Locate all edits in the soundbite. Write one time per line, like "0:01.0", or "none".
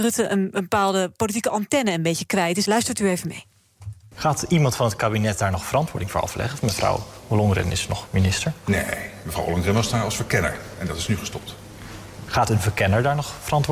0:02.7

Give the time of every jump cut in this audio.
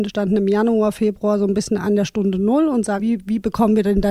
0:03.0

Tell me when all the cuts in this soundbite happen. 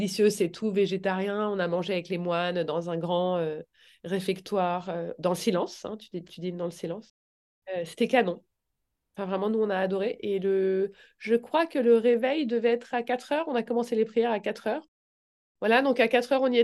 none

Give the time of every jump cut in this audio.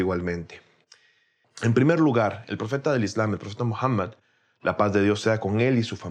0:01.4

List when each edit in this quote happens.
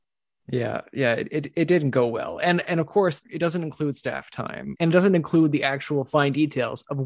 0:03.2
0:04.7

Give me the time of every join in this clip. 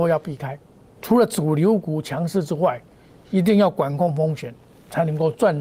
0:01.0

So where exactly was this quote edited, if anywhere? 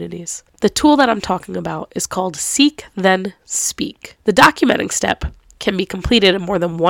0:04.2
0:05.5

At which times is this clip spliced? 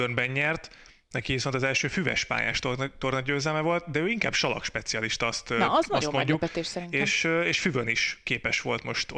none

